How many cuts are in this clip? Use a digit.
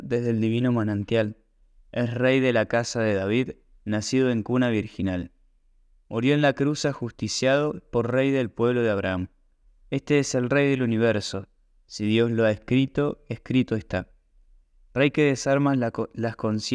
0